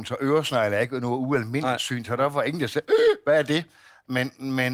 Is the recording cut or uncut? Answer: uncut